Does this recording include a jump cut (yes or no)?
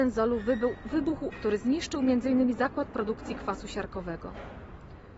yes